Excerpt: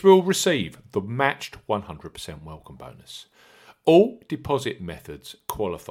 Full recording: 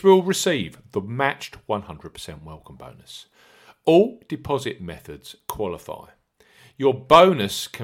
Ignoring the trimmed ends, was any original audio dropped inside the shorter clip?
no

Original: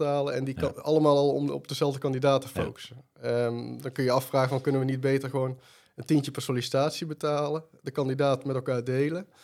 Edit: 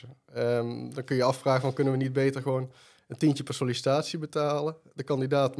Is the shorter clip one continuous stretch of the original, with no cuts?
yes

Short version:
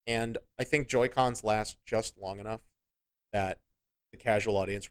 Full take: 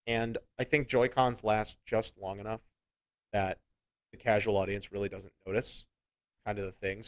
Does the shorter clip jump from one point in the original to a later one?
no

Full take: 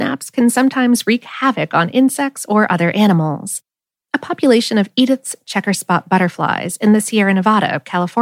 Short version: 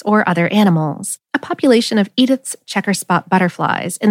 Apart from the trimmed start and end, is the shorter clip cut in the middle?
yes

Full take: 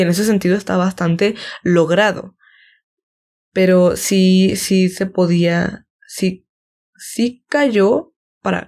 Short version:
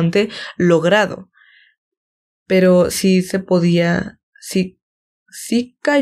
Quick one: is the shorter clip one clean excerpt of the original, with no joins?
no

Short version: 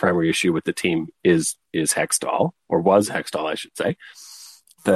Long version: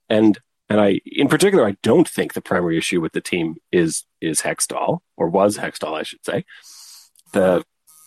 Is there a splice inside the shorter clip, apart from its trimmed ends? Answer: no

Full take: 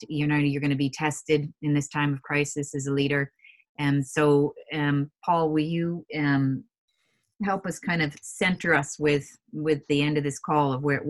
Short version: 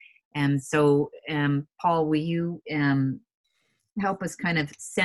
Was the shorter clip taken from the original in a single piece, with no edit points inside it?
yes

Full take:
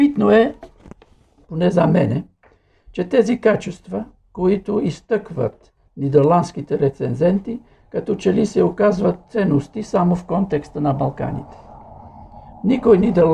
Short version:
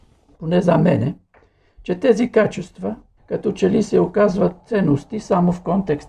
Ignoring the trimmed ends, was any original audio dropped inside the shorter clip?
yes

